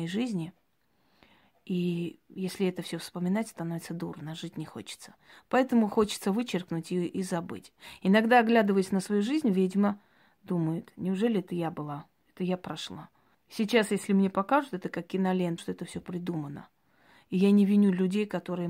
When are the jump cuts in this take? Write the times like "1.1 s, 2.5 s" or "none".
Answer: 13.3 s, 15.6 s